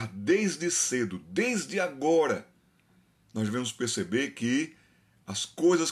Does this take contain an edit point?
no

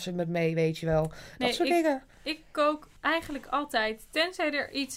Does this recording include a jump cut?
yes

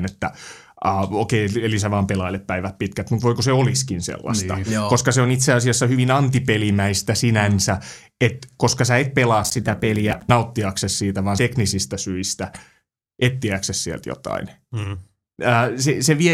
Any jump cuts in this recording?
no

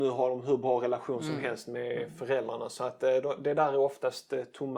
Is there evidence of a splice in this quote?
no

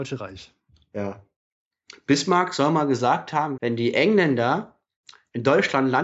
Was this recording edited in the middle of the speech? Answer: yes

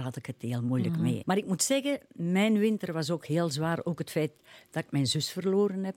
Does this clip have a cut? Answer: yes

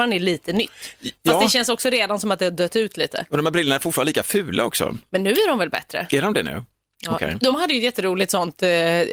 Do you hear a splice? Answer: no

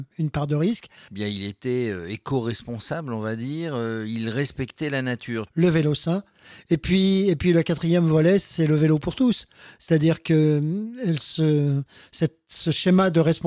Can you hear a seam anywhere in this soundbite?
yes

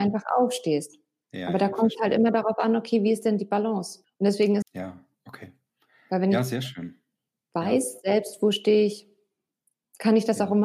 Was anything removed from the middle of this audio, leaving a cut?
yes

